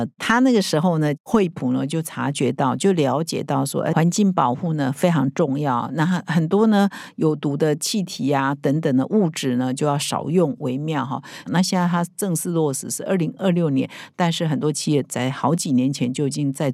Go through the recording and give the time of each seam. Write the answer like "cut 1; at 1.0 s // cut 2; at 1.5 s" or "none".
cut 1; at 11.5 s

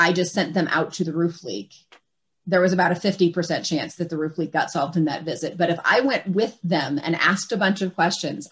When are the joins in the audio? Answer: none

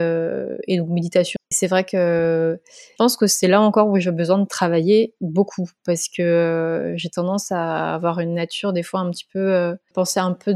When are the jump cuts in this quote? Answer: cut 1; at 1.4 s

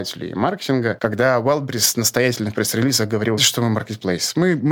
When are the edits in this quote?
cut 1; at 1.0 s // cut 2; at 3.4 s

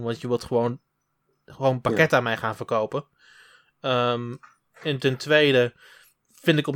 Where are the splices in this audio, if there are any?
none

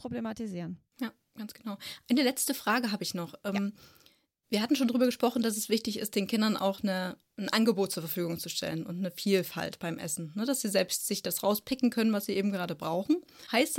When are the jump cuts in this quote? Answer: none

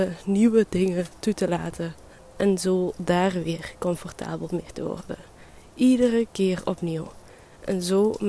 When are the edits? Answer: none

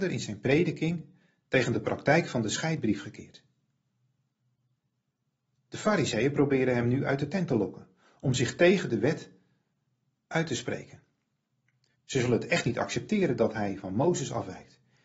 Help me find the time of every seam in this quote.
cut 1; at 11.9 s

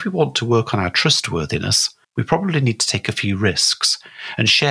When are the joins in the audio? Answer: cut 1; at 2.0 s

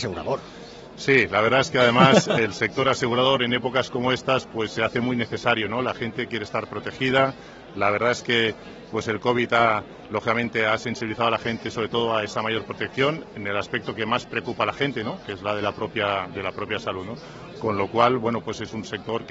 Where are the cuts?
none

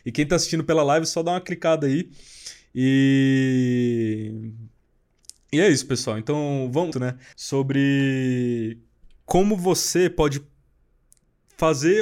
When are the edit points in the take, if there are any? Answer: cut 1; at 6.9 s

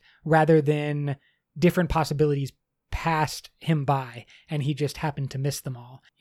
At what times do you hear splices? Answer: none

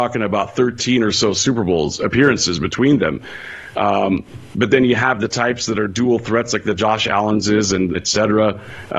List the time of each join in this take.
cut 1; at 3.7 s // cut 2; at 7.9 s

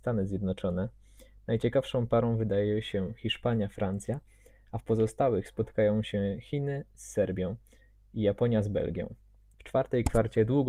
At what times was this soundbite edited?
cut 1; at 9.5 s

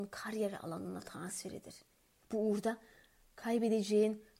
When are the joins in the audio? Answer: cut 1; at 2.2 s

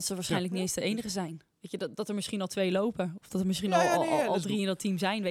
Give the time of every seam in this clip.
none

